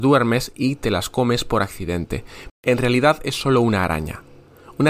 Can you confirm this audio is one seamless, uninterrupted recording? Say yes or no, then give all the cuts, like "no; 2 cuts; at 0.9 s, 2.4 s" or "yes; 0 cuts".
no; 1 cut; at 2.5 s